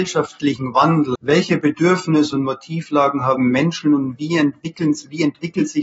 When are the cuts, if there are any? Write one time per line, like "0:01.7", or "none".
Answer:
0:01.2